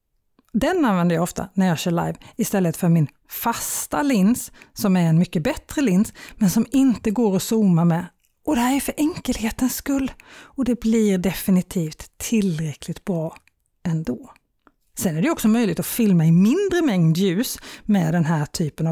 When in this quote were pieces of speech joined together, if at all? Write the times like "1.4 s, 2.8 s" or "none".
none